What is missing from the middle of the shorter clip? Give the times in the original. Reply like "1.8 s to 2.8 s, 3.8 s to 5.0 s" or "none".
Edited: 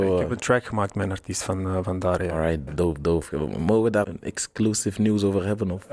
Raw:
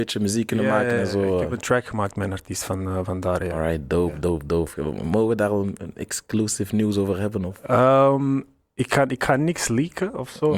3.9 s to 4.1 s, 5.5 s to 5.8 s